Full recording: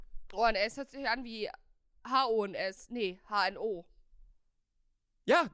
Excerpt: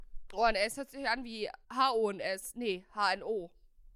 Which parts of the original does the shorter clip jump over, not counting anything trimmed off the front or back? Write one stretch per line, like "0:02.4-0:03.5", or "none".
0:01.6-0:02.0